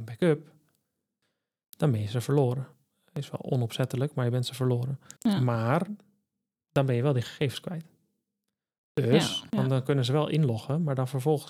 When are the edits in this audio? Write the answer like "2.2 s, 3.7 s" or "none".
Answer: 5.2 s, 9.5 s